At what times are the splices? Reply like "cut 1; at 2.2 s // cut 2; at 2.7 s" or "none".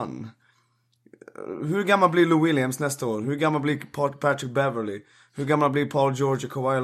none